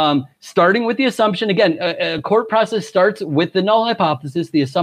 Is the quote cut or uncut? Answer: uncut